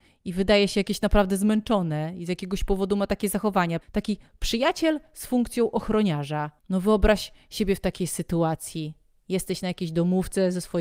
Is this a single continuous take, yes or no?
no